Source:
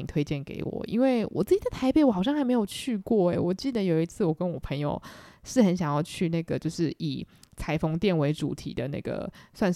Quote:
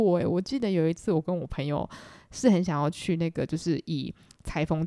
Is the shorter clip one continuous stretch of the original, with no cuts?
yes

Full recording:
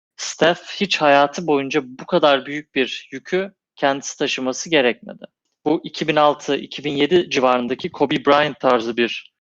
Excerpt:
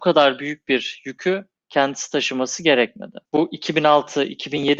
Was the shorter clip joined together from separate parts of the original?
yes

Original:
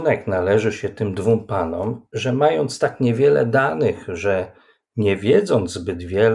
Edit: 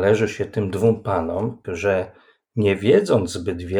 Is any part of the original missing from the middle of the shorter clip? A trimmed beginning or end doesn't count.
yes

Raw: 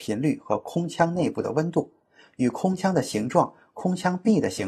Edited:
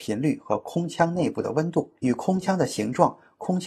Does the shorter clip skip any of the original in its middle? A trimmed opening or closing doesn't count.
yes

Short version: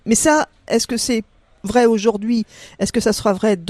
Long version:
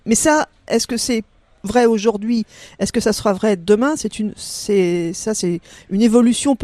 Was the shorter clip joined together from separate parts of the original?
no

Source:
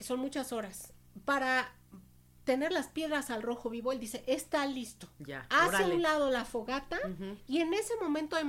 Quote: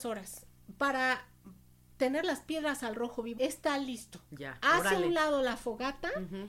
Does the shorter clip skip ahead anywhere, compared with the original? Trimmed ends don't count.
yes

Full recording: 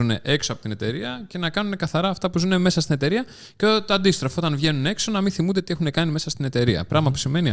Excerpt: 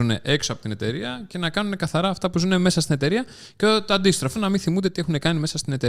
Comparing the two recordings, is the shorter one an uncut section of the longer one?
no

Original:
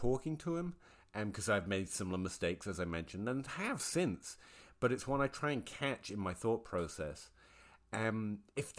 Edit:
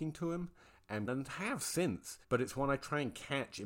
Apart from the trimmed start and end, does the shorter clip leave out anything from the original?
yes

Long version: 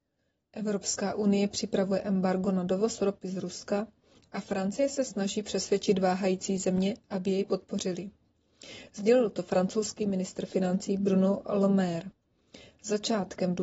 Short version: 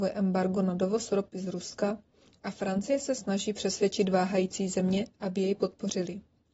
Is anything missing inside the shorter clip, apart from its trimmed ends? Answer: no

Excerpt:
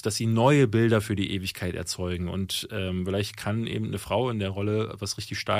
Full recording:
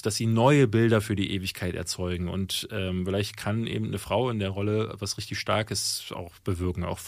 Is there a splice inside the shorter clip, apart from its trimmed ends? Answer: no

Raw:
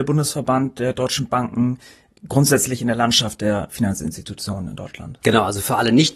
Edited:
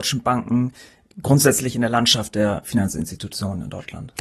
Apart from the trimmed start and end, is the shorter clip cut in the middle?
no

